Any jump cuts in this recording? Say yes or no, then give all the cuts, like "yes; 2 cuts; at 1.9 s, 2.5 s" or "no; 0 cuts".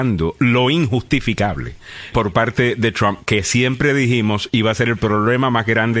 yes; 1 cut; at 2.1 s